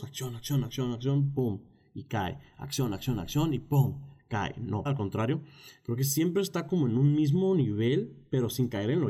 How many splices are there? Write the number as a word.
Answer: one